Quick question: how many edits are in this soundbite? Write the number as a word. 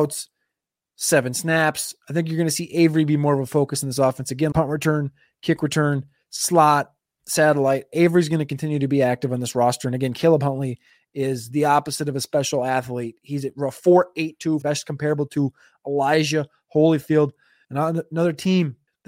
three